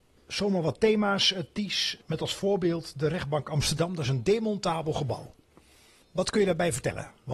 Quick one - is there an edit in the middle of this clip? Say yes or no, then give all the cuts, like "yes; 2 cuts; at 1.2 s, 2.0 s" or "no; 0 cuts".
no; 0 cuts